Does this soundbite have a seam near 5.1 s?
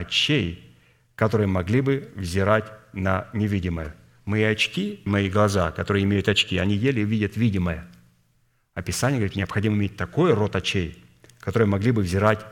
yes; 1 cut; at 5.1 s

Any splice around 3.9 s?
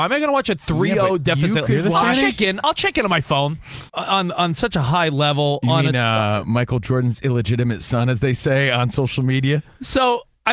yes; 1 cut; at 3.9 s

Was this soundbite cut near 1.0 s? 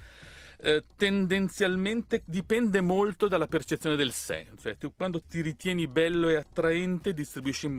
no; 1 cut; at 5.2 s

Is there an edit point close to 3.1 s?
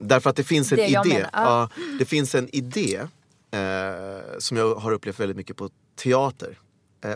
no; 0 cuts

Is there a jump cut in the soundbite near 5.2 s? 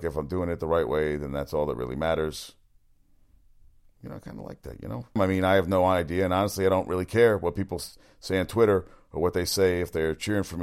yes; 1 cut; at 5.2 s

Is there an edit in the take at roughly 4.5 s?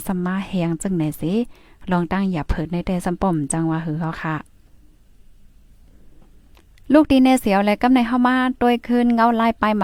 no; 0 cuts

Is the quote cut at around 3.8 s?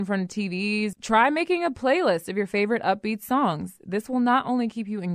no; 0 cuts

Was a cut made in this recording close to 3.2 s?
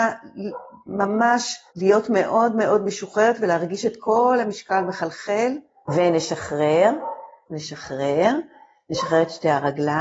no; 3 cuts; at 1.7 s, 5.9 s, 7.5 s

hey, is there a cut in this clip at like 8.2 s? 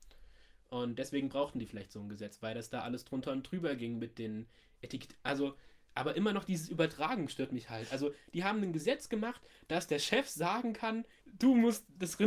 no; 1 cut; at 11.2 s

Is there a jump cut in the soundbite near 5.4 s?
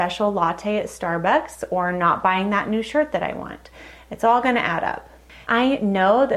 yes; 1 cut; at 5.4 s

